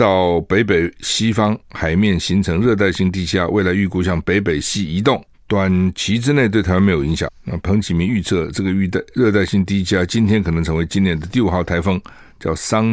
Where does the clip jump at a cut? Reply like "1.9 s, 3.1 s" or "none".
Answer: 7.6 s